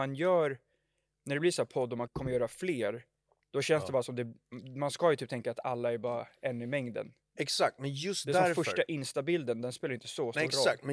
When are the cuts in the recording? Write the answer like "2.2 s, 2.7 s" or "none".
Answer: 2.1 s